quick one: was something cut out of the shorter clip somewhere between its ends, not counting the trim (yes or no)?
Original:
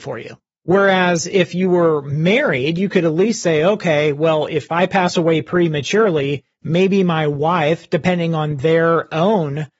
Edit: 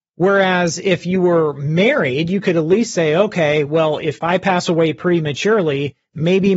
no